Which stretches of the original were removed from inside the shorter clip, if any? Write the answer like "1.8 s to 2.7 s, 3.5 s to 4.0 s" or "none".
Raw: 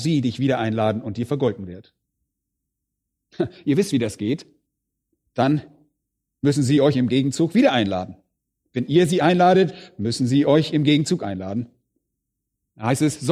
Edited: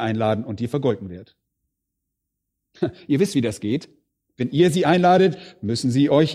4.8 s to 8.6 s